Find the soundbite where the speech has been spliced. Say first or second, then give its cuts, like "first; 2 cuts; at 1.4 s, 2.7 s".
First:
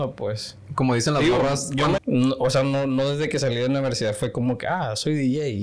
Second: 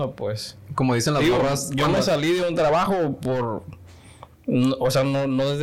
first; 1 cut; at 2.0 s